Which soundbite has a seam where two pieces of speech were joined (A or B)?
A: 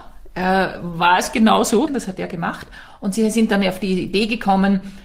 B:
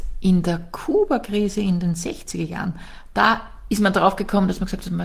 A